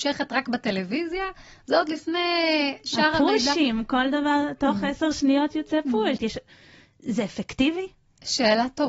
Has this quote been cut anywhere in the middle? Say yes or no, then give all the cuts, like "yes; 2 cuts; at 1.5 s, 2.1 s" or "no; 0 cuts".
yes; 1 cut; at 6.2 s